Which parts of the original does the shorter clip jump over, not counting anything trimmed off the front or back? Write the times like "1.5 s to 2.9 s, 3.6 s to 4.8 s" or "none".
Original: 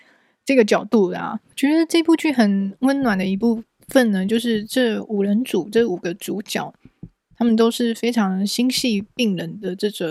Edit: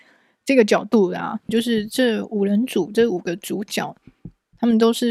1.5 s to 4.3 s